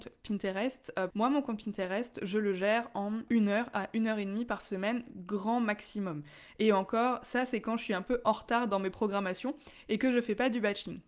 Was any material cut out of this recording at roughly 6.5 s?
no; 2 cuts; at 1.1 s, 3.3 s

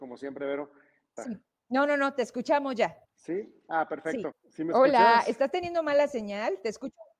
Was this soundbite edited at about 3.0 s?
yes; 3 cuts; at 1.2 s, 3.0 s, 4.3 s

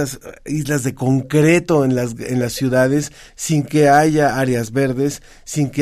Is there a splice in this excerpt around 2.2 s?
no; 0 cuts

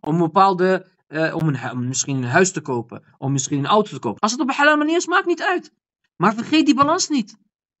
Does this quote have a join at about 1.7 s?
no; 1 cut; at 4.2 s

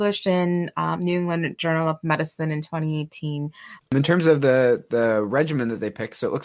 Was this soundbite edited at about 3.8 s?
yes; 1 cut; at 3.8 s

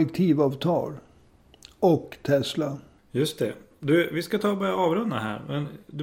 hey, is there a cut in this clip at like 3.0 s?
yes; 1 cut; at 3.0 s

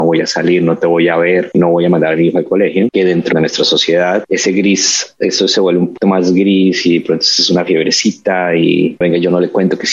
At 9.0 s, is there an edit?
yes; 1 cut; at 9.0 s

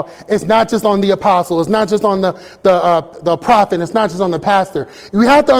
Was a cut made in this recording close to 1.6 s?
no; 0 cuts

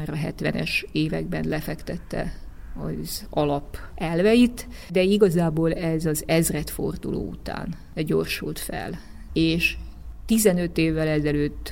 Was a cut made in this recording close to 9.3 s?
yes; 1 cut; at 9.3 s

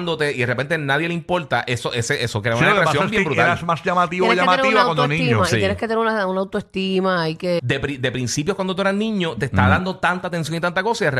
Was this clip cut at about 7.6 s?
yes; 1 cut; at 7.6 s

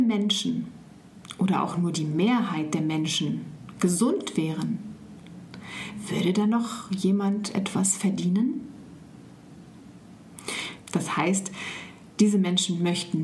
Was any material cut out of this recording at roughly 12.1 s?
no; 1 cut; at 10.8 s

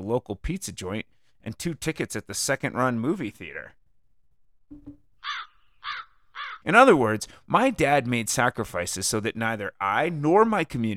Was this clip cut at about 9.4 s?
no; 1 cut; at 6.6 s

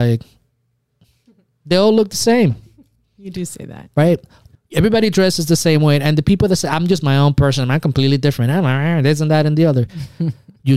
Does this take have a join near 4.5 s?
yes; 1 cut; at 4.5 s

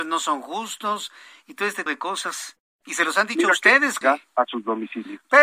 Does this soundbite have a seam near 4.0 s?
yes; 2 cuts; at 1.9 s, 4.0 s

